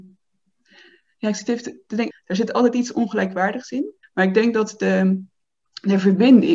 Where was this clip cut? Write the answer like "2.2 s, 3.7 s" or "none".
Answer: 2.1 s, 4.0 s